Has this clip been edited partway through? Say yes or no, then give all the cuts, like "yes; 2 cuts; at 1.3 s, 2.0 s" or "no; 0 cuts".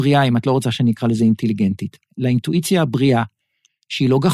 no; 0 cuts